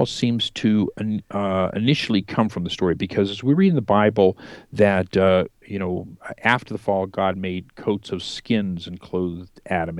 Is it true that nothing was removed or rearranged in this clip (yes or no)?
yes